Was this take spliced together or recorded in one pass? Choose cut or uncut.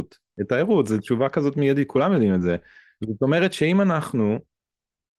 uncut